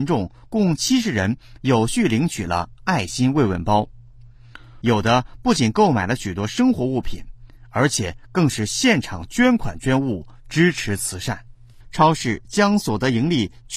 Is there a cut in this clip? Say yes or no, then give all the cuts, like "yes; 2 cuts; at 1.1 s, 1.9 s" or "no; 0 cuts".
yes; 2 cuts; at 4.8 s, 11.8 s